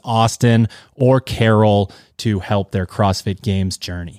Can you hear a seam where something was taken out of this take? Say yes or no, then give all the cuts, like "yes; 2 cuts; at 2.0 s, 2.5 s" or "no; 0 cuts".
no; 0 cuts